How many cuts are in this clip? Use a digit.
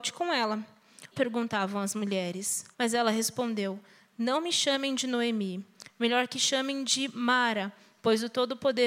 2